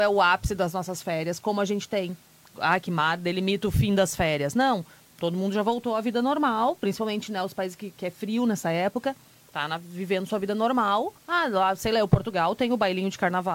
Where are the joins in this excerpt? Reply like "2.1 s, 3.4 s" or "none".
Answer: 11.2 s